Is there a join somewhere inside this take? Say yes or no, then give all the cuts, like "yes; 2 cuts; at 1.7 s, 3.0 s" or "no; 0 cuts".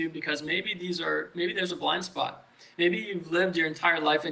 no; 0 cuts